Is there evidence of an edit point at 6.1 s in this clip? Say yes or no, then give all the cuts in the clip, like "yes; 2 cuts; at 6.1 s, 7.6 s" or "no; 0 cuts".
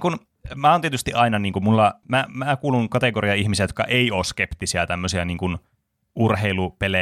no; 1 cut; at 2.0 s